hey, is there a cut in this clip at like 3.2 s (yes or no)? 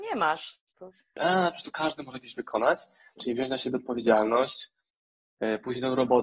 yes